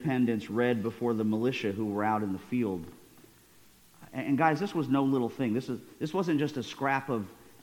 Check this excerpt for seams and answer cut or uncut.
uncut